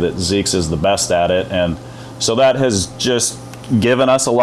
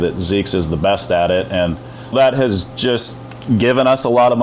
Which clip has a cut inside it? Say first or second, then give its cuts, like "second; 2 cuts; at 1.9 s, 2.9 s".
second; 1 cut; at 2.1 s